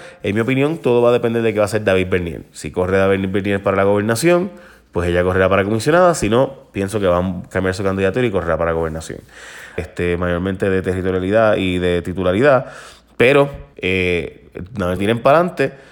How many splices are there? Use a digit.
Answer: 3